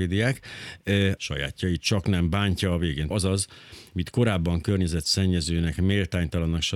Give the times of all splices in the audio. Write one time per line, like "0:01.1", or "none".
0:01.2
0:03.1